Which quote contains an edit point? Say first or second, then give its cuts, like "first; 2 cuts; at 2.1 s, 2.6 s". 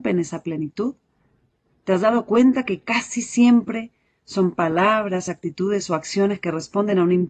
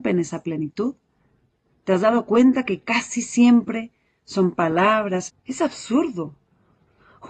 second; 1 cut; at 5.3 s